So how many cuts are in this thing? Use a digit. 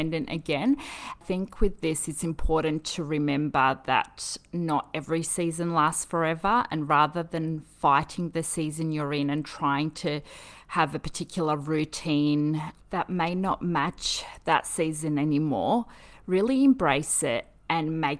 0